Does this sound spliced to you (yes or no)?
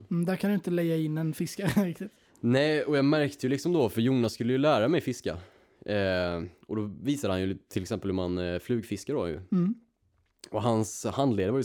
no